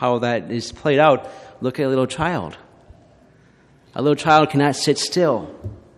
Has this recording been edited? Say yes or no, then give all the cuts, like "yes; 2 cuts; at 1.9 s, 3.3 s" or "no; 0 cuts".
no; 0 cuts